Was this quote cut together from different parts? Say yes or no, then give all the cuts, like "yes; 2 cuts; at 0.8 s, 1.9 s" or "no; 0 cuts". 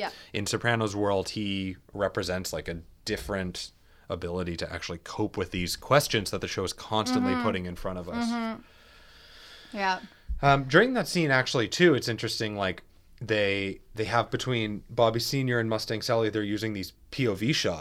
no; 0 cuts